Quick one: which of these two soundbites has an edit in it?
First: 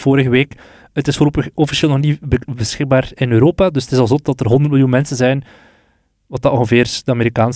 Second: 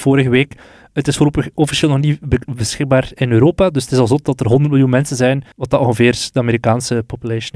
second; 1 cut; at 5.5 s

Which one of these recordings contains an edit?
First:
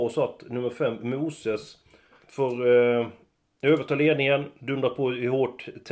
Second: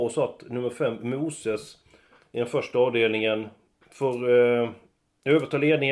first; 1 cut; at 2.2 s

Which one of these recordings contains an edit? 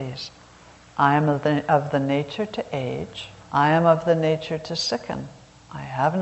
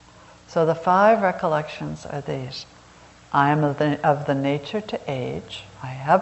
first; 1 cut; at 3.4 s

